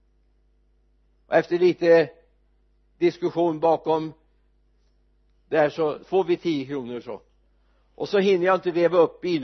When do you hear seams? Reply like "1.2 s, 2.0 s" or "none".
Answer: 6.0 s